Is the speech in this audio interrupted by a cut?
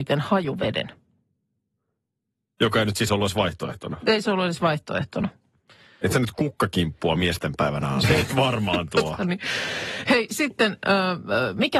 yes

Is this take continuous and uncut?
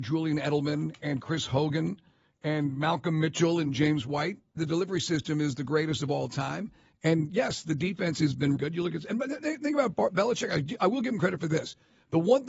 no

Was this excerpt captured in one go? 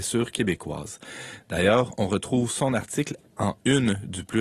yes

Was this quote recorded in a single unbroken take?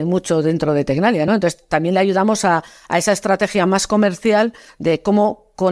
yes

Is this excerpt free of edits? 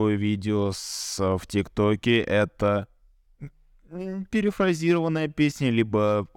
yes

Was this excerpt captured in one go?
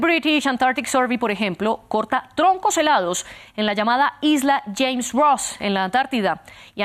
yes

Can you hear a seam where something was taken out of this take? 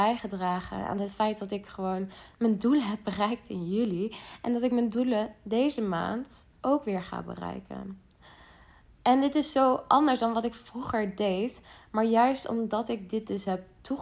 yes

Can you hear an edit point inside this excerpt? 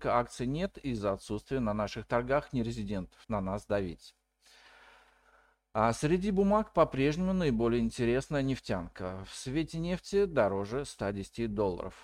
yes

